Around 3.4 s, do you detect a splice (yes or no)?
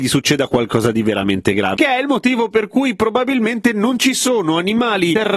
no